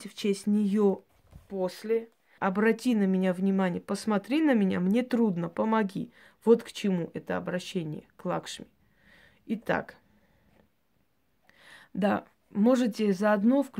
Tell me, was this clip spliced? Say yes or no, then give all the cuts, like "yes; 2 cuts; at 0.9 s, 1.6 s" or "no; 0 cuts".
yes; 1 cut; at 2.4 s